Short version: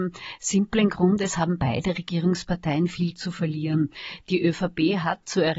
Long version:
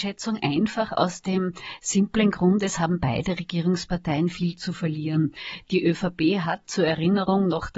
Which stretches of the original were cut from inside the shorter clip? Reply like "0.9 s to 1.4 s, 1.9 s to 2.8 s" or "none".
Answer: none